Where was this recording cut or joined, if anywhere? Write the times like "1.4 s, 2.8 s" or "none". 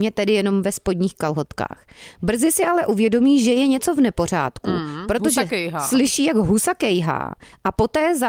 none